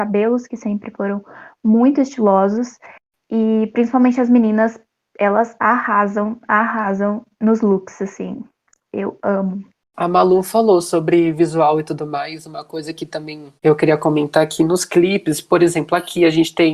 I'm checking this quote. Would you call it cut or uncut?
cut